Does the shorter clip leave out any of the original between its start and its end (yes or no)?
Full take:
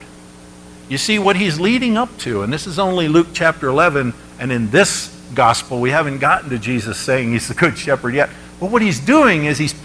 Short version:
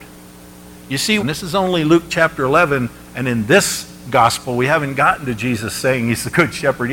yes